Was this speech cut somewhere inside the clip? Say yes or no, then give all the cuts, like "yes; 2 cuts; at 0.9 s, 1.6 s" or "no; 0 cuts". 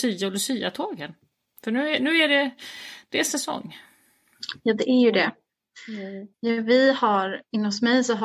yes; 1 cut; at 6.3 s